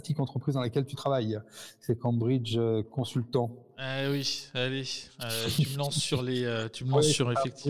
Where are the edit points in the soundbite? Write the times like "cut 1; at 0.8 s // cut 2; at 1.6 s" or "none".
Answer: none